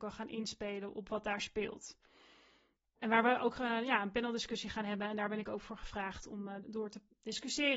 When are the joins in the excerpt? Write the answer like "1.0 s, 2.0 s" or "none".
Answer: 2.8 s, 6.6 s